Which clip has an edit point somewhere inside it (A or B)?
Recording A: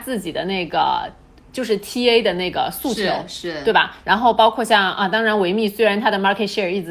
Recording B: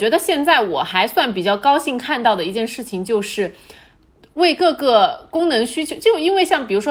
A